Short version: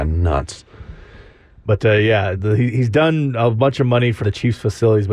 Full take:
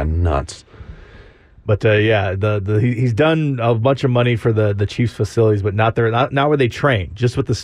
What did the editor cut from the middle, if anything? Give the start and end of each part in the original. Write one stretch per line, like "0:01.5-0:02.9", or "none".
0:02.4-0:02.6
0:04.4-0:04.7